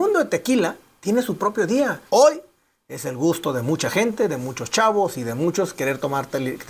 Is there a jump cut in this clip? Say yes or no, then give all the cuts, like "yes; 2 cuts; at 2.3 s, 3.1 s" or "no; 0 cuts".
yes; 1 cut; at 2.1 s